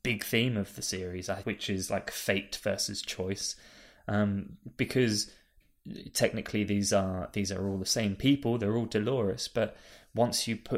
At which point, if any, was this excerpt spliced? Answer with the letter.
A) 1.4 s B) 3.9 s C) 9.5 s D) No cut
A